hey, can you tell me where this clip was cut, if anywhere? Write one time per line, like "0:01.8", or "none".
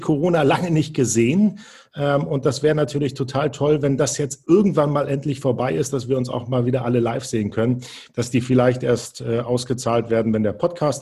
0:08.1